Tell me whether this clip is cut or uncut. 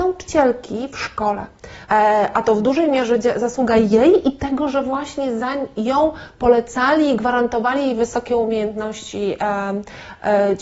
cut